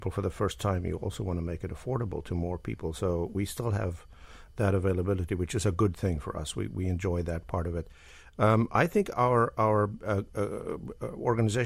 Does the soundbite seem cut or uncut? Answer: uncut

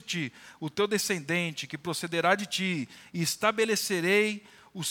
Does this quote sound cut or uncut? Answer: uncut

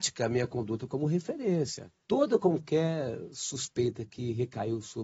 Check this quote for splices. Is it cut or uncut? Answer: cut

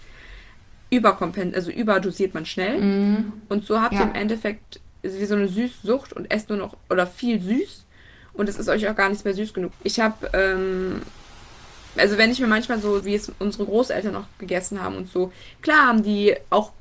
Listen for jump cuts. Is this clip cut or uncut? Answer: cut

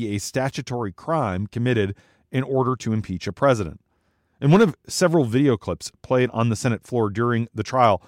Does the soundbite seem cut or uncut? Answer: uncut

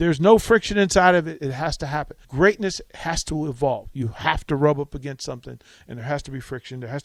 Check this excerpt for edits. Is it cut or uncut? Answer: cut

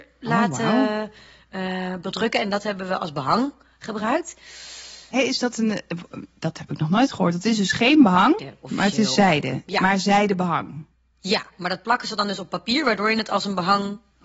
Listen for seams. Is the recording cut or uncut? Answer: cut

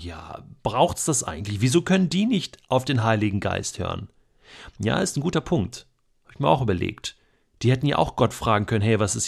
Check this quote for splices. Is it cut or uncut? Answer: uncut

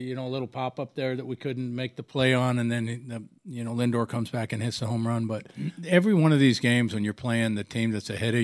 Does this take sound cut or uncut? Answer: uncut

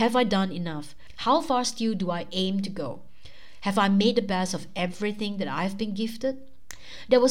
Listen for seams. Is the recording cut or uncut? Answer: uncut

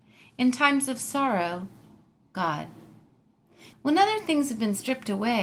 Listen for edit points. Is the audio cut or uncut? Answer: cut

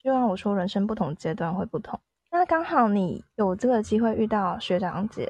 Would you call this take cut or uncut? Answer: uncut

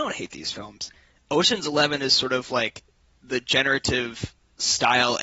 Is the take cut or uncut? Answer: uncut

